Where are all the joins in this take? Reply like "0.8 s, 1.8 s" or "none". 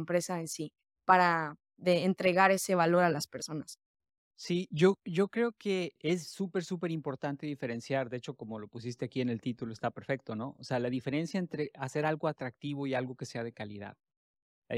none